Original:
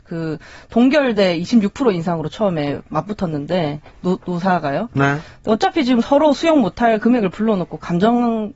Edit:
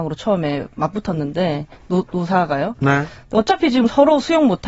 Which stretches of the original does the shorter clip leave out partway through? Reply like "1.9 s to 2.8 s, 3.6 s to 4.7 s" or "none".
none